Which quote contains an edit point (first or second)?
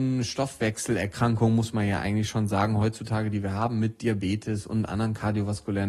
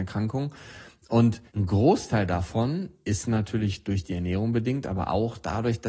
second